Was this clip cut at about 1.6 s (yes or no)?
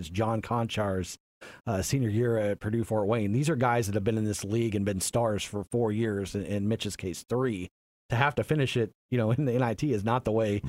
no